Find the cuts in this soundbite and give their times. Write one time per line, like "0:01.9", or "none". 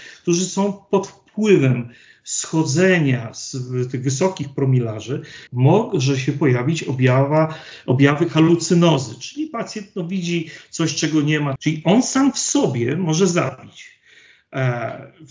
0:05.5
0:11.6